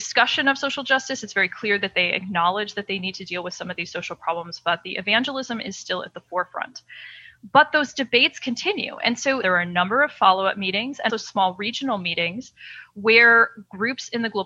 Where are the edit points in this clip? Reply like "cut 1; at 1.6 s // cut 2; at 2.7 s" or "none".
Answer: cut 1; at 9.4 s // cut 2; at 11.1 s